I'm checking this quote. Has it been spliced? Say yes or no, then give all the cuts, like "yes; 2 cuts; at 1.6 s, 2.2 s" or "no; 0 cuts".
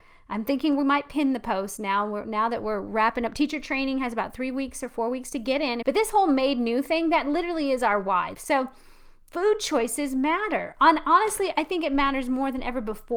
yes; 2 cuts; at 5.8 s, 8.3 s